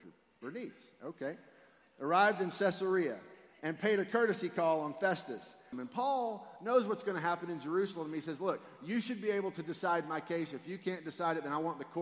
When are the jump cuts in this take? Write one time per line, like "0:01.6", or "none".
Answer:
0:05.7